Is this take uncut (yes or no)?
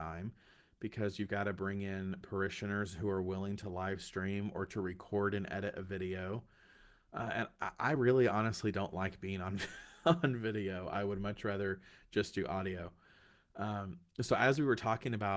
yes